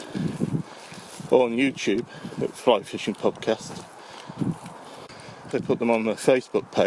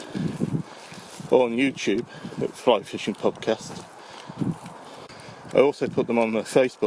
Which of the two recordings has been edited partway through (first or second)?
first